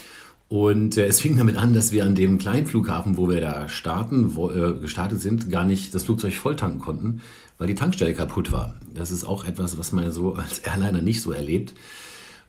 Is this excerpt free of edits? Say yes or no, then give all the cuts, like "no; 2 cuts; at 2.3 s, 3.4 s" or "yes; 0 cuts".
yes; 0 cuts